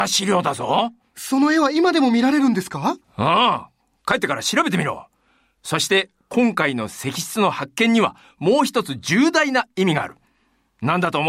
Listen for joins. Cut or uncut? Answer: uncut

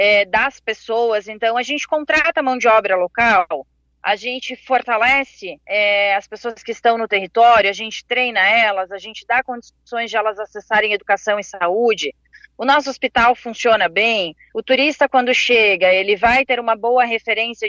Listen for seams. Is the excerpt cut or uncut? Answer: uncut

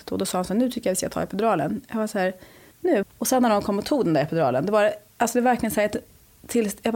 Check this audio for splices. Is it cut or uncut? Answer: cut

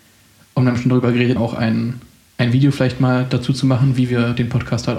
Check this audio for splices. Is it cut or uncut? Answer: cut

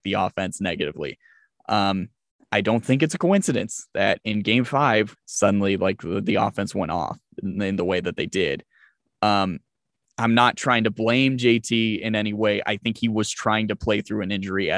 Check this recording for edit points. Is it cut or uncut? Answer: cut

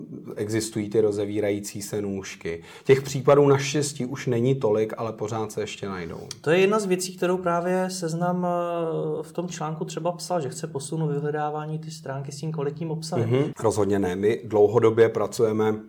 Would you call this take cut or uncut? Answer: cut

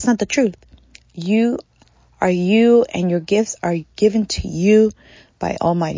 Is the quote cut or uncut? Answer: uncut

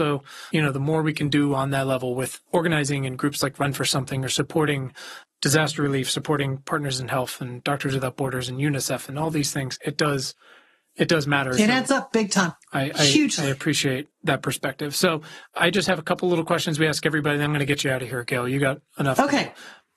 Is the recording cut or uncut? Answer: cut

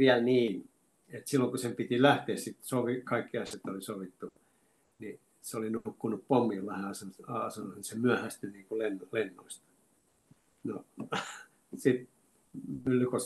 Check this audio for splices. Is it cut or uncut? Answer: uncut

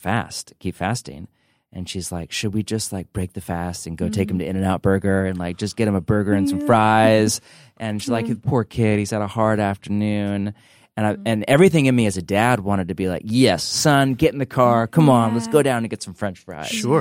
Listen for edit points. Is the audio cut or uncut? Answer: uncut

